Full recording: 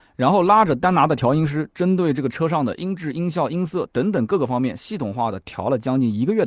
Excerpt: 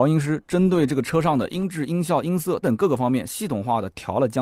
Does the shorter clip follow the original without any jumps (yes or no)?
no